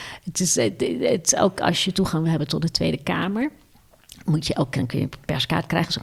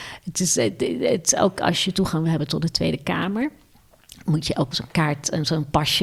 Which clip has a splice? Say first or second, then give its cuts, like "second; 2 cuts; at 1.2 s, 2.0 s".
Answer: second; 1 cut; at 4.7 s